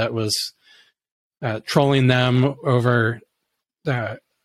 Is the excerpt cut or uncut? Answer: uncut